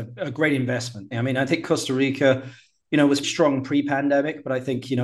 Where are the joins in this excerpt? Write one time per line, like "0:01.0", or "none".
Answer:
0:01.1
0:03.2

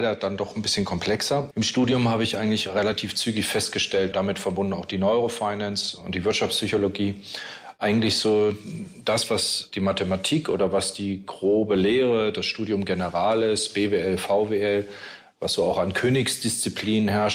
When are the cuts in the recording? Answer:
0:01.5
0:04.1

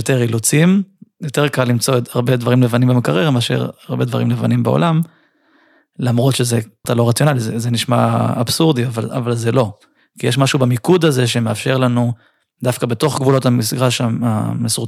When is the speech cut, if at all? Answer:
0:06.8

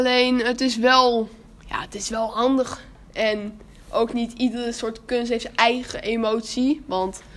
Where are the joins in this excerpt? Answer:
none

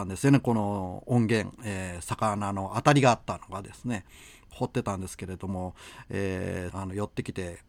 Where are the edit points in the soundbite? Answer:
0:04.5
0:06.7

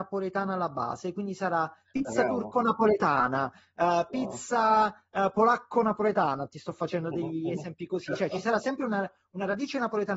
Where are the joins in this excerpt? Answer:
none

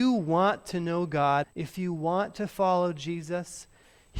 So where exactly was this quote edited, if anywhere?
0:01.4

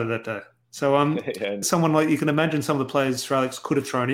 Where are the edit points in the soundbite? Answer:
0:01.6

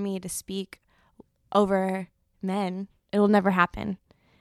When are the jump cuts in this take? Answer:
none

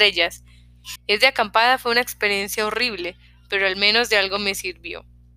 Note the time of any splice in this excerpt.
0:01.0

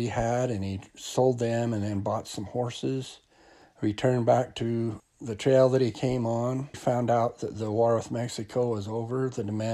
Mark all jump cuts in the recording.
0:06.7

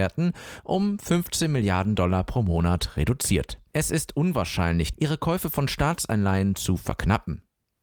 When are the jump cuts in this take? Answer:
0:03.7
0:04.9

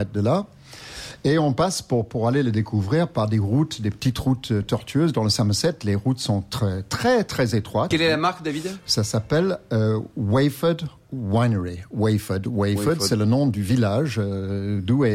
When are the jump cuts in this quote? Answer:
0:07.9

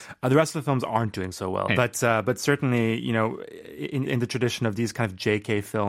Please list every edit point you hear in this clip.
0:01.7
0:04.1

